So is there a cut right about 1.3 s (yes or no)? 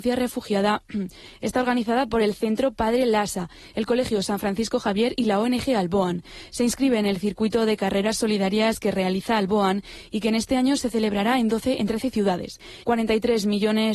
no